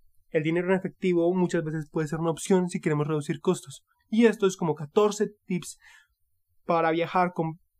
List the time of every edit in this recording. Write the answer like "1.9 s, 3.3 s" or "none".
none